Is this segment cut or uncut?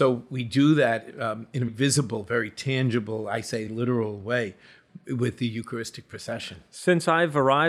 cut